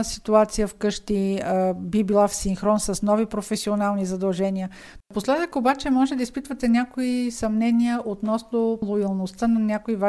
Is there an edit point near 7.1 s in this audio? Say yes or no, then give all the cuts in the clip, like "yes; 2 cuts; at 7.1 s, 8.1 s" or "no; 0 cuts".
no; 2 cuts; at 5.0 s, 8.8 s